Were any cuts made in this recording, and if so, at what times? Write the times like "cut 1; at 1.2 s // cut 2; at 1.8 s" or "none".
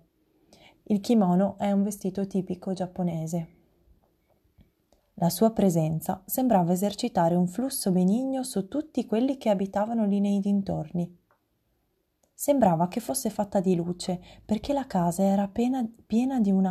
cut 1; at 5.0 s // cut 2; at 12.3 s